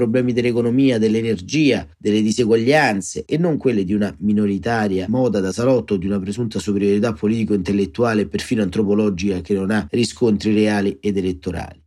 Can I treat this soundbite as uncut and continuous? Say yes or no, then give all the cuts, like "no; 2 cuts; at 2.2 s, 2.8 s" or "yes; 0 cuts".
yes; 0 cuts